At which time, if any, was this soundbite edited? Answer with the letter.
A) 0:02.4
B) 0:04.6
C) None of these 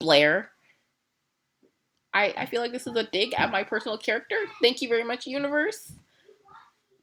A